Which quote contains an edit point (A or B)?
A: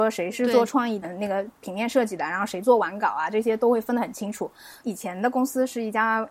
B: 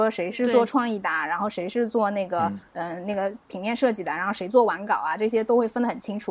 A